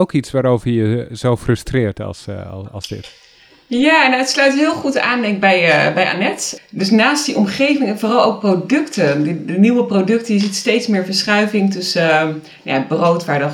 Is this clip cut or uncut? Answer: cut